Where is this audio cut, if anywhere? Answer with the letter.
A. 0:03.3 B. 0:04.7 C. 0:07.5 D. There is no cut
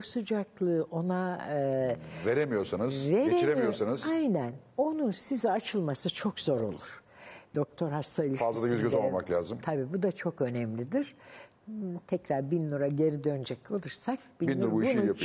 C